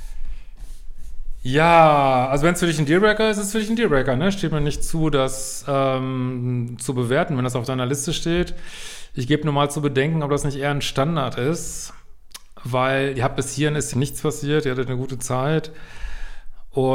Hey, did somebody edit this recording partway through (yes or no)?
yes